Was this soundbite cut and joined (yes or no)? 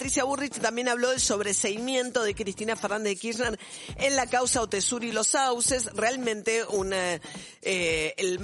no